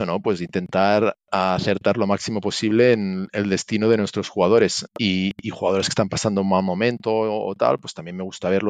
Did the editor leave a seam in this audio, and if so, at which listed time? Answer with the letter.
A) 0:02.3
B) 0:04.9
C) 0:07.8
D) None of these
B